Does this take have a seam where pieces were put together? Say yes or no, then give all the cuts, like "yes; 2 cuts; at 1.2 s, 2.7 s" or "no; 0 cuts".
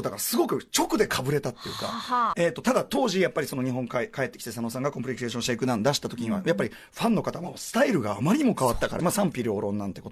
yes; 2 cuts; at 2.3 s, 9.0 s